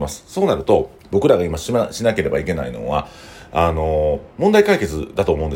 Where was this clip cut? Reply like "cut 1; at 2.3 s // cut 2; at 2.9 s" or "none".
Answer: cut 1; at 1.0 s // cut 2; at 4.3 s